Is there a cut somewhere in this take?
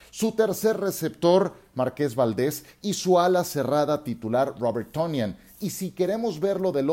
no; 0 cuts

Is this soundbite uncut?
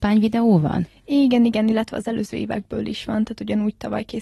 yes; 0 cuts

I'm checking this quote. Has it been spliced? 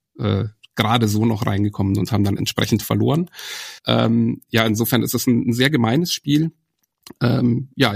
yes; 1 cut; at 3.8 s

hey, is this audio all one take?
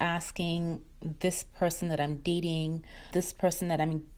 no; 1 cut; at 3.1 s

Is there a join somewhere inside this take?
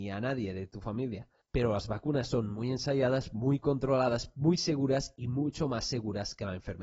no; 0 cuts

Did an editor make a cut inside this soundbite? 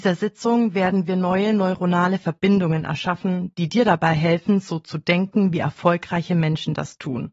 no; 0 cuts

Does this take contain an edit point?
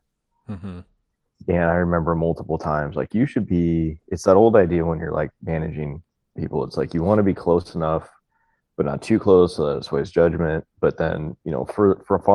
no; 0 cuts

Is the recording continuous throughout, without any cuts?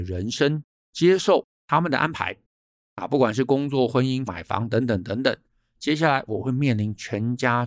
no; 1 cut; at 4.3 s

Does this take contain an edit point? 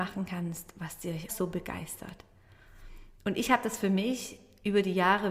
yes; 1 cut; at 1.3 s

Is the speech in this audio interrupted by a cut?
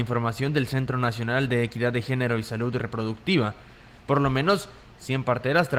no; 0 cuts

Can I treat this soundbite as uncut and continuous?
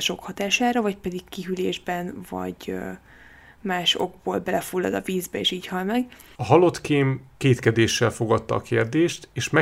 no; 1 cut; at 6.4 s

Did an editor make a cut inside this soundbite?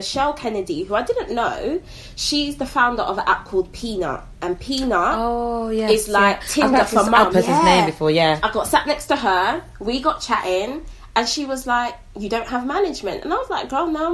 yes; 1 cut; at 7.3 s

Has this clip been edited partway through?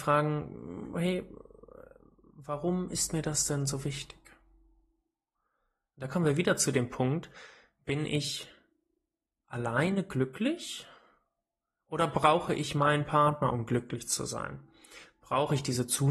no; 0 cuts

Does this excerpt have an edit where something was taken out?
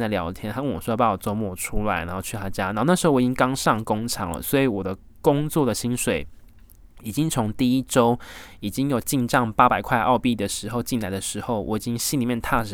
no; 0 cuts

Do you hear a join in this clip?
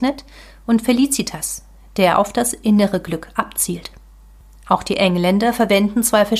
no; 0 cuts

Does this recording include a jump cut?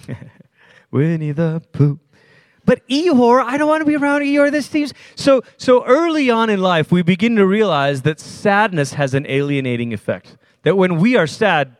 no; 0 cuts

